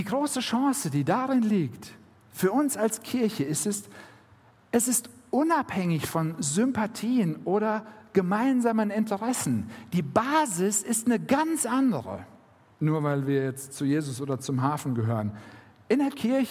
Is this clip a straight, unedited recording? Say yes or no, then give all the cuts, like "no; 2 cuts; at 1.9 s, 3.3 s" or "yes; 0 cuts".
no; 1 cut; at 12.7 s